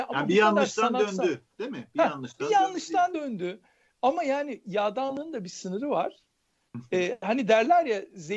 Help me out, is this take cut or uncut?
uncut